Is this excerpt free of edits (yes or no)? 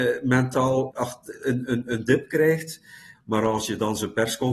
no